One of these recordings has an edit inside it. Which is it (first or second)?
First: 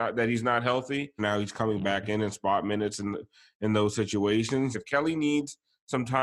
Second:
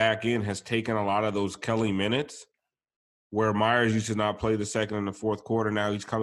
first